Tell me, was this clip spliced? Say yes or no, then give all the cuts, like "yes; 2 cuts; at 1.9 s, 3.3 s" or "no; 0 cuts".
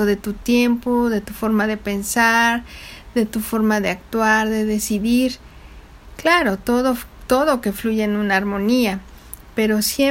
no; 0 cuts